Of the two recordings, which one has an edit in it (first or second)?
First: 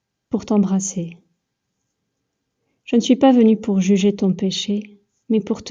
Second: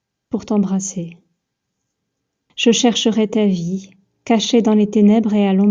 second